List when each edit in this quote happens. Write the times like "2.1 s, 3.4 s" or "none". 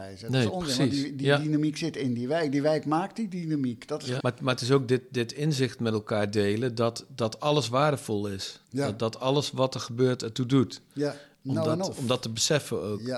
4.2 s, 11.3 s